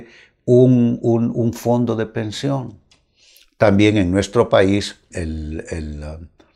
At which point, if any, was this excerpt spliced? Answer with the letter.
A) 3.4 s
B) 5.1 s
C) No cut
B